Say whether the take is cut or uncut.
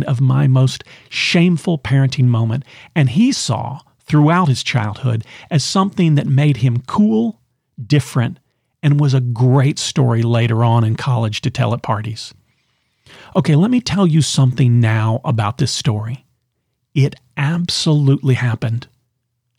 uncut